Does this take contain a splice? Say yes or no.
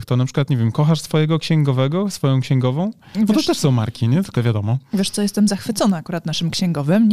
yes